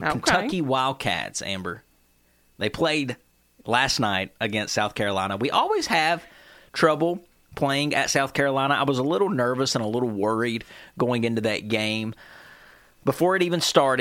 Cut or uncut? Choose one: uncut